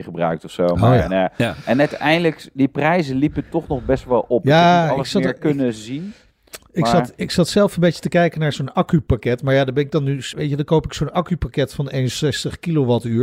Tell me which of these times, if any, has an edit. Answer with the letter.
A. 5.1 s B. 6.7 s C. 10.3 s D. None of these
C